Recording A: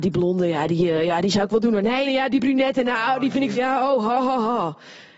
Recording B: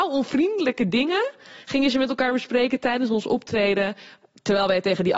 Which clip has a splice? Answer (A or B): A